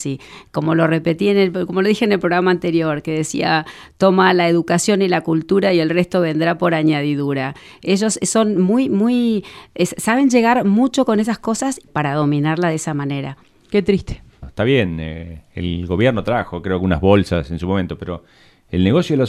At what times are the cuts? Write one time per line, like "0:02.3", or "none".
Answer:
0:11.9
0:14.4

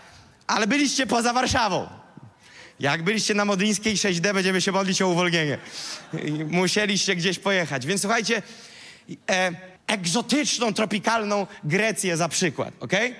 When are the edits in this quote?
0:09.8

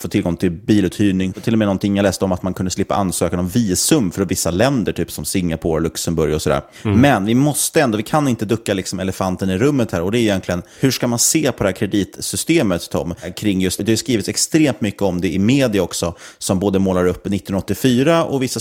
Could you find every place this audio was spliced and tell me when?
0:01.3
0:13.8

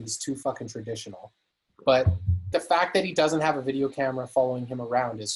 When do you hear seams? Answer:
0:02.5

